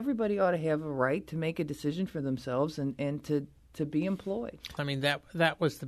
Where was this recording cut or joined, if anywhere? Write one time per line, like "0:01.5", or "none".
0:04.8